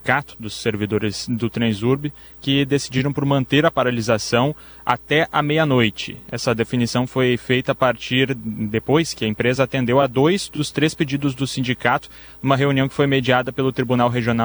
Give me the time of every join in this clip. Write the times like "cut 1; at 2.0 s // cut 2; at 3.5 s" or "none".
none